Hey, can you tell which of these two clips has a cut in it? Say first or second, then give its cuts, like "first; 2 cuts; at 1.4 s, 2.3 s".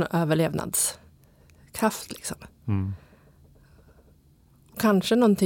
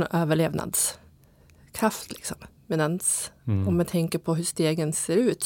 second; 1 cut; at 2.6 s